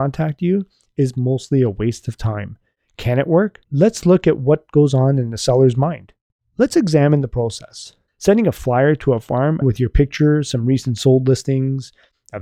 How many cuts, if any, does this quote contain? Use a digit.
3